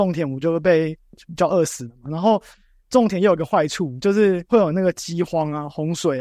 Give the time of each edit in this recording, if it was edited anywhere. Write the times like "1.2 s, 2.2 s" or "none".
1.1 s